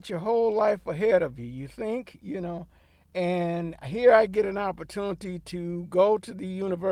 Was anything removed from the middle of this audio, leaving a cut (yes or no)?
no